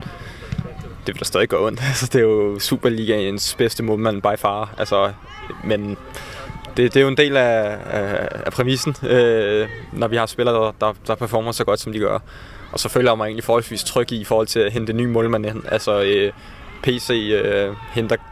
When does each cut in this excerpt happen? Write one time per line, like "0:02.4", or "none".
none